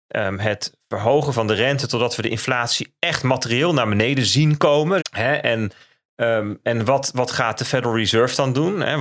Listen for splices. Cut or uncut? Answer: cut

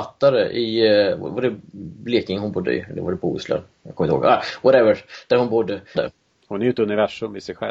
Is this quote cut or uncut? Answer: cut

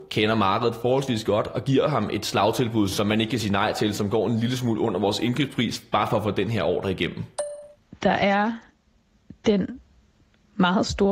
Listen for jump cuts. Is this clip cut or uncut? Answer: uncut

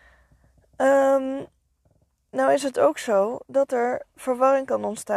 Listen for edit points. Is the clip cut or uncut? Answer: uncut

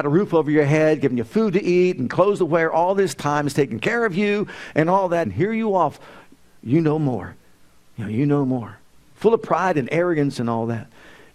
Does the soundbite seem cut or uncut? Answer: cut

